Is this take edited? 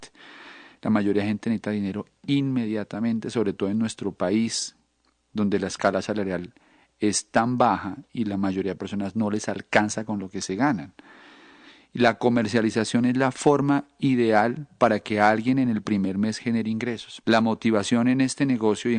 yes; 1 cut; at 17.2 s

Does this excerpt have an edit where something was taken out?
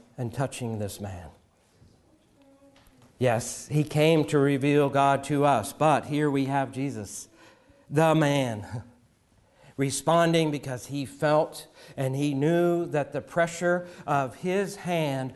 no; 0 cuts

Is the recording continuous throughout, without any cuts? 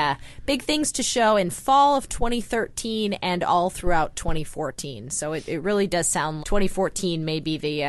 no; 1 cut; at 6.4 s

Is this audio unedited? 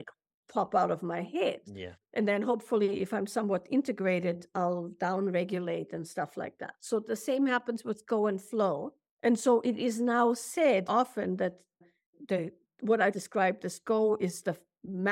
no; 2 cuts; at 10.9 s, 13.1 s

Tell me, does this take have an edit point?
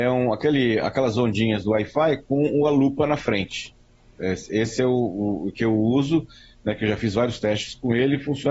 no; 0 cuts

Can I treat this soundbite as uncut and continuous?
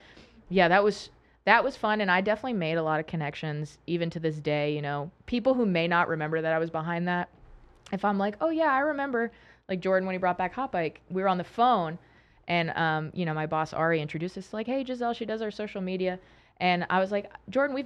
yes; 0 cuts

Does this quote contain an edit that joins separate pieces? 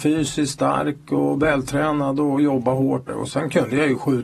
yes; 1 cut; at 3.1 s

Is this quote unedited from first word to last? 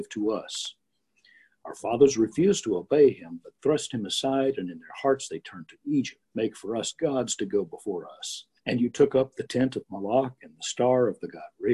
no; 2 cuts; at 6.2 s, 8.6 s

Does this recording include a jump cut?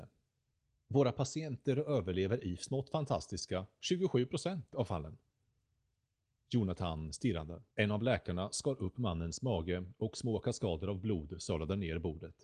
yes; 1 cut; at 7.7 s

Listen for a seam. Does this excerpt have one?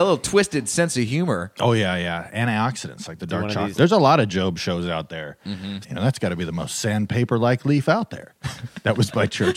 yes; 2 cuts; at 3.7 s, 5.8 s

